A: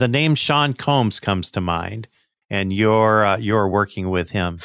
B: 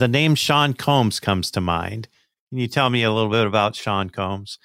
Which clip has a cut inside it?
A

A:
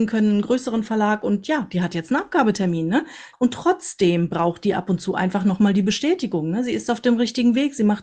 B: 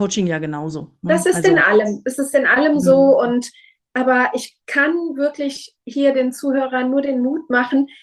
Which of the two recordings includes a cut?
A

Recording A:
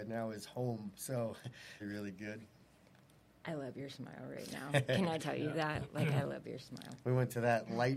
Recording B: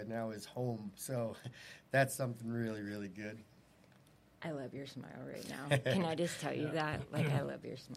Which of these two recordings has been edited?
A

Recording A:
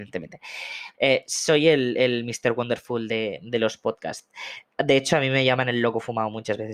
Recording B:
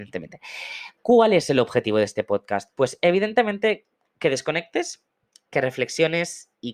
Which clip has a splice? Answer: A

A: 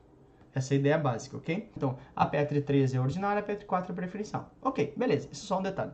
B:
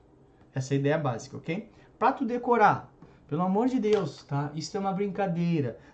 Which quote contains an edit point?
A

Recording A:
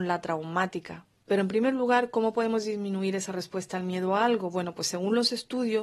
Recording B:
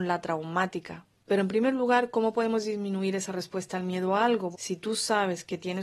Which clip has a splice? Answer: B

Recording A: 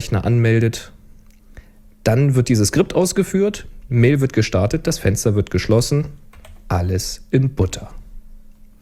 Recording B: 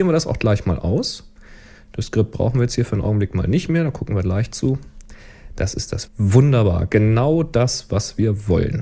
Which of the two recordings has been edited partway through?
B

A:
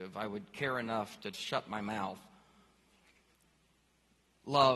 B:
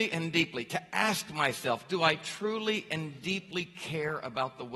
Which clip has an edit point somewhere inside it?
A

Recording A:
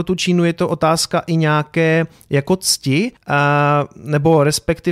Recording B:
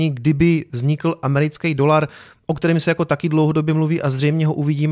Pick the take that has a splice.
A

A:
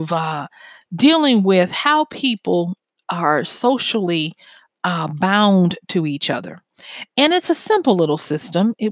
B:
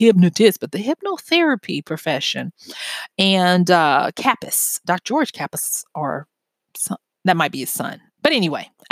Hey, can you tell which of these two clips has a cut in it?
B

